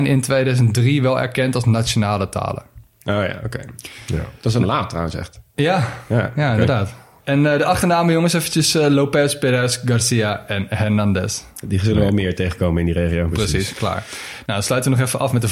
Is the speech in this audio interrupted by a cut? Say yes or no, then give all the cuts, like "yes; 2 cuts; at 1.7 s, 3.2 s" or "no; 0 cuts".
no; 0 cuts